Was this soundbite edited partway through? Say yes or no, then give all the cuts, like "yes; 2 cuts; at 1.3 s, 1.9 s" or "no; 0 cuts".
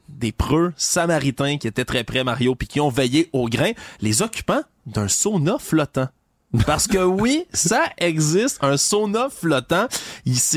no; 0 cuts